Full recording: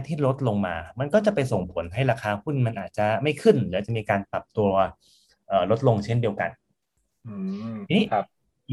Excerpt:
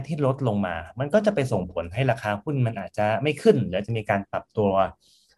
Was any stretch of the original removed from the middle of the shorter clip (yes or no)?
no